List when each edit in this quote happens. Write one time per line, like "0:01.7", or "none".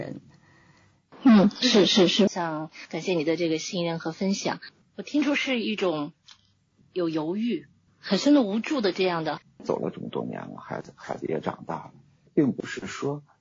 0:02.3
0:07.9
0:09.4